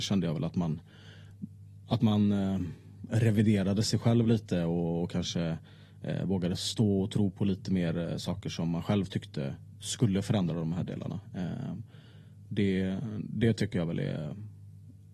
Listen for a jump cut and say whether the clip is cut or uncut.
uncut